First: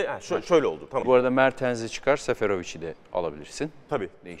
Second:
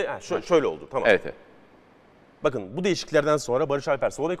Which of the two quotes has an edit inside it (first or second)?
first